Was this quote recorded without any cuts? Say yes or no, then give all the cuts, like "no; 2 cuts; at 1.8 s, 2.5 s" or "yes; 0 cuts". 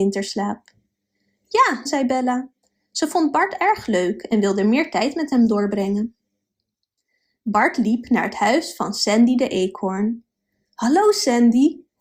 no; 1 cut; at 1.9 s